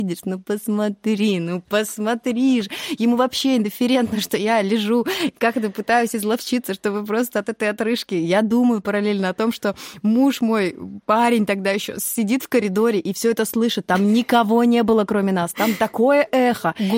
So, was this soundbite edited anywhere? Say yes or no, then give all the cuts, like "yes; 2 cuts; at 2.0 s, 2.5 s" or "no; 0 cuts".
no; 0 cuts